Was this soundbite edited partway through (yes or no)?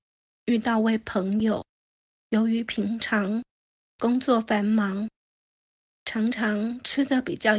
no